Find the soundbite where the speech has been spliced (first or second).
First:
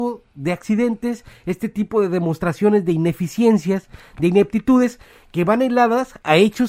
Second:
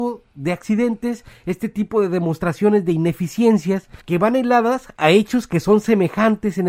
second